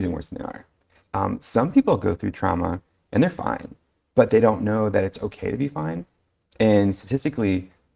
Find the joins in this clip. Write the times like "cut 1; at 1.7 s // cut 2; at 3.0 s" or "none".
cut 1; at 1.0 s